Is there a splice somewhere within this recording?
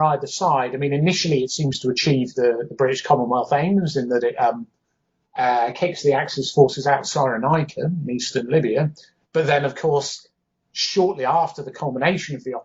no; 0 cuts

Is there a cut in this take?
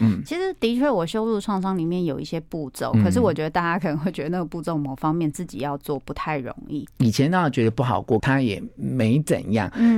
yes; 2 cuts; at 6.9 s, 8.2 s

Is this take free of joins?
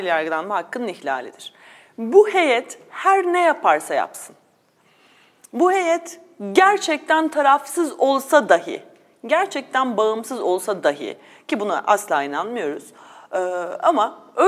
yes; 0 cuts

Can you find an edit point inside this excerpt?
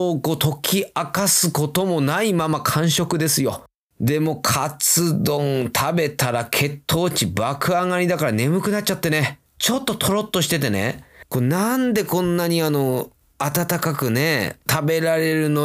yes; 1 cut; at 9.5 s

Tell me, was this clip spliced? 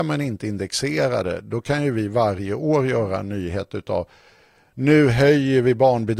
no; 0 cuts

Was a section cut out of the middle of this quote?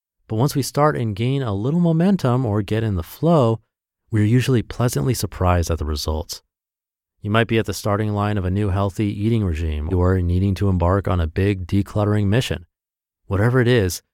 yes; 1 cut; at 9.9 s

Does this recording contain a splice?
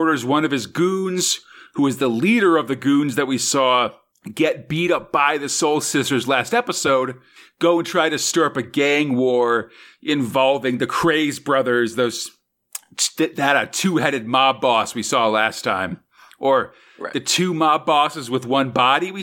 no; 0 cuts

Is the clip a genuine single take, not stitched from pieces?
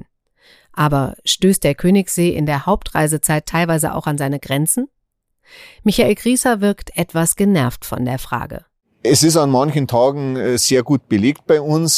yes; 0 cuts

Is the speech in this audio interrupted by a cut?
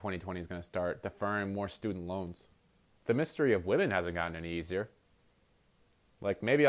yes; 1 cut; at 2.9 s

